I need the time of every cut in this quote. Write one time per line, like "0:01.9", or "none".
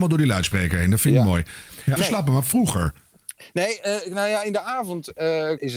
0:02.0